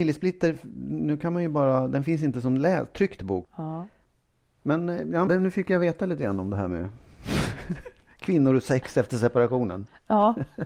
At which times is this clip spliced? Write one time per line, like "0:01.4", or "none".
0:03.4
0:05.3

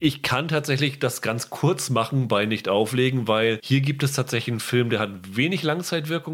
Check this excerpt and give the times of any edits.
none

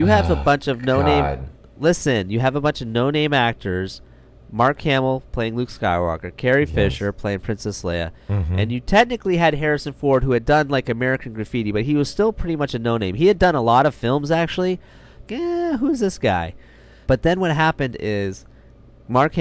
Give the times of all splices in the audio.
0:15.3
0:17.0

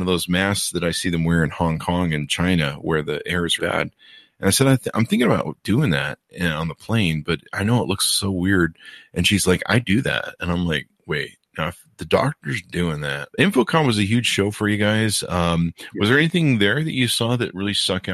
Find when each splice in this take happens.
0:03.6
0:13.3

